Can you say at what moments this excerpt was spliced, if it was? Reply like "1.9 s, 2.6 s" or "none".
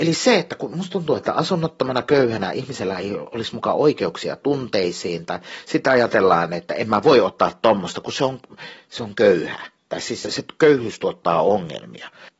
10.2 s